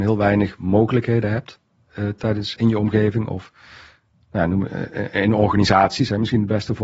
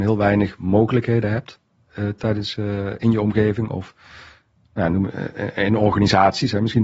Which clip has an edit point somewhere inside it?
first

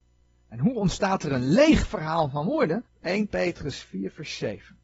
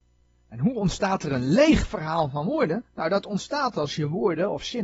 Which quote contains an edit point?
first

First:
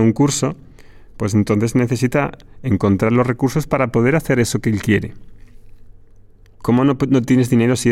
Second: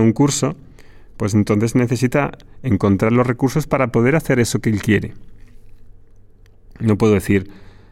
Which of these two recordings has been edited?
first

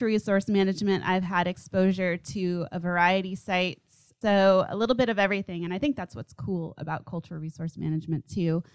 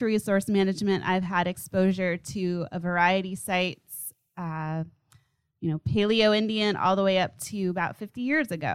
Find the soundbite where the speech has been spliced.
first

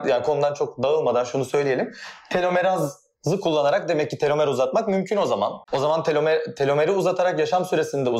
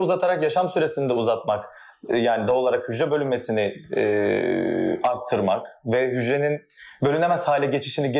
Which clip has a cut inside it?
first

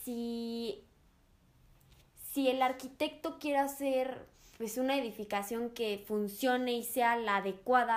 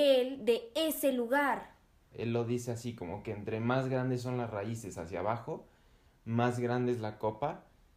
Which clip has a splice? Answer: second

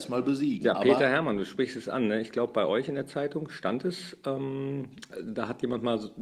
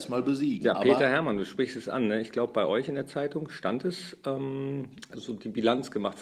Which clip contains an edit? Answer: second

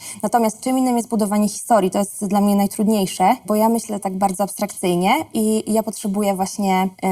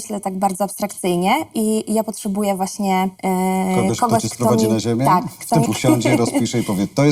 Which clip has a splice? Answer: second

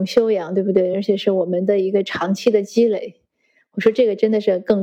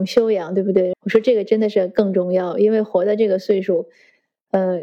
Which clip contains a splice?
second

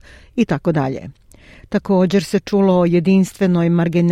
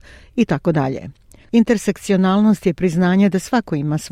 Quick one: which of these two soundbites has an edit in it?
second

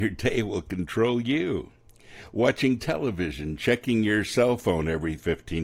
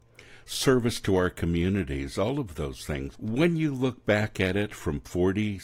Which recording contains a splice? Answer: second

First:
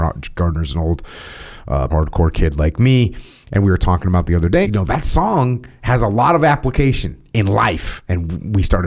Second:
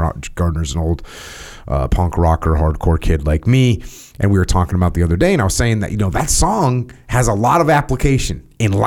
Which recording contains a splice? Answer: first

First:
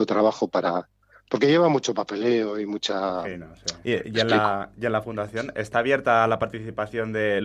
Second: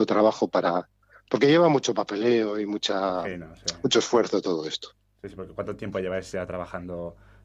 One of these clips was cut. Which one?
first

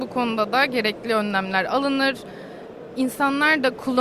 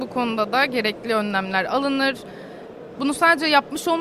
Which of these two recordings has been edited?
second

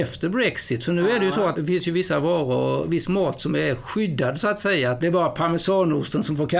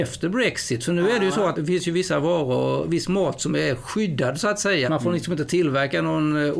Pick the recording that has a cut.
second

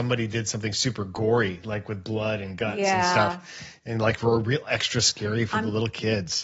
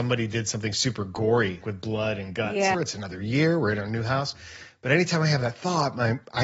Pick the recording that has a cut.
second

